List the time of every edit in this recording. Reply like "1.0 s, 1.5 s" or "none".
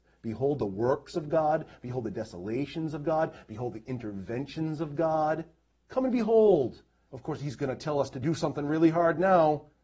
7.1 s